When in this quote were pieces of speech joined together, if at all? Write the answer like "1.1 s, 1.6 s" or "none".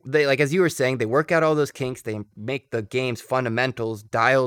none